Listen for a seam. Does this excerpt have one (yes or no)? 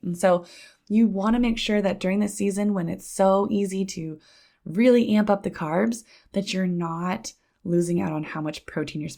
no